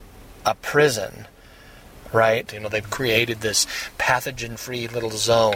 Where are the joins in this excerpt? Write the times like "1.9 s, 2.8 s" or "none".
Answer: 2.5 s